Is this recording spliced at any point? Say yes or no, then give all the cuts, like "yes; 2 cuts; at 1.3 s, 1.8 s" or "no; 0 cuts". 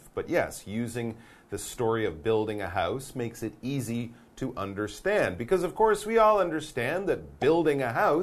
no; 0 cuts